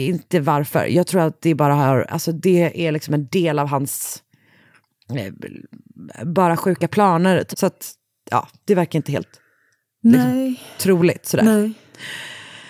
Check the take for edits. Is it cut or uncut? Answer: cut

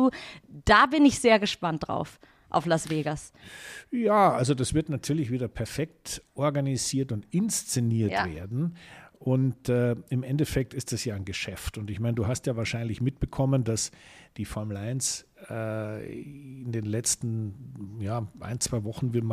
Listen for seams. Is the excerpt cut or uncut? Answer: uncut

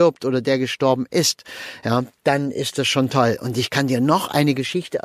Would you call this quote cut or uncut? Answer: uncut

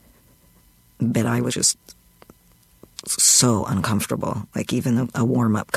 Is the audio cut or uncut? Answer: cut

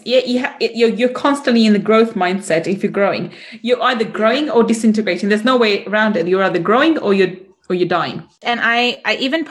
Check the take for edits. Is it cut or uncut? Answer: cut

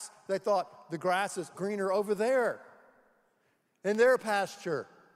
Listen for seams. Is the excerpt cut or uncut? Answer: cut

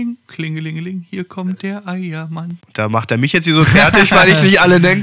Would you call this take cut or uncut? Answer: cut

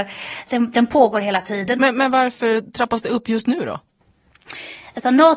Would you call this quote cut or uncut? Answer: cut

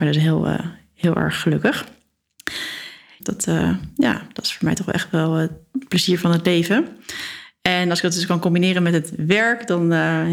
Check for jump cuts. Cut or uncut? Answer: cut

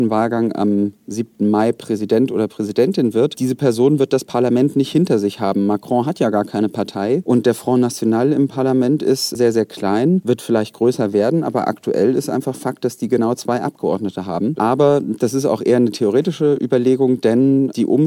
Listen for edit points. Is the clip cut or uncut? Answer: uncut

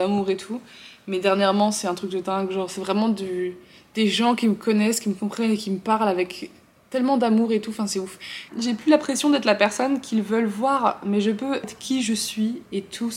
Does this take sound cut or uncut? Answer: cut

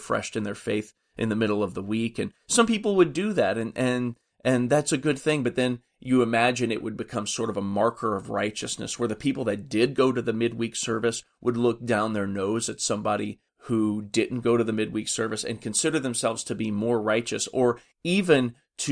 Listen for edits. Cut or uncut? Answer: uncut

